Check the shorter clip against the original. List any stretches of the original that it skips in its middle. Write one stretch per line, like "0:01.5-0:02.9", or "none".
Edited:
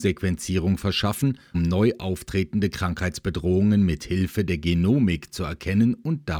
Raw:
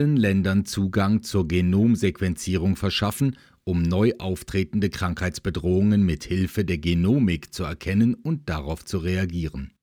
0:03.5-0:03.7